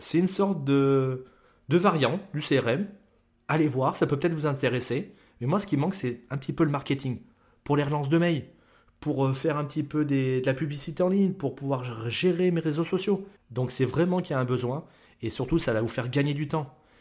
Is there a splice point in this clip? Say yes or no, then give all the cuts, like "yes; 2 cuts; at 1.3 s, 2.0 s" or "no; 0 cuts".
yes; 1 cut; at 13.4 s